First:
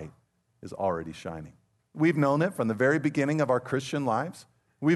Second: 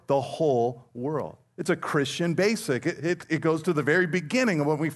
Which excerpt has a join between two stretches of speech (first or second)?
first